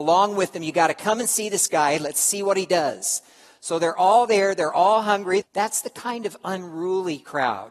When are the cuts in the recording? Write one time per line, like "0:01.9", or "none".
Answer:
0:05.4